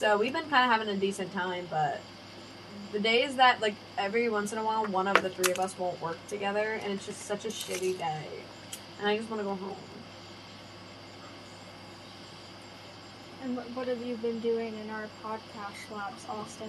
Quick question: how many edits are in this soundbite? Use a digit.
0